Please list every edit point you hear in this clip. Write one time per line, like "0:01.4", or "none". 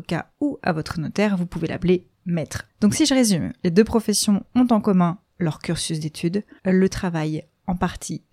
0:02.7
0:06.6